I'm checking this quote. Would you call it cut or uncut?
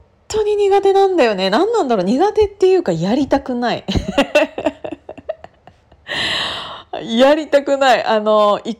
uncut